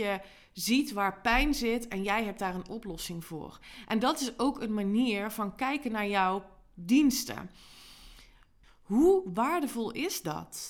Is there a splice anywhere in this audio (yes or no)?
yes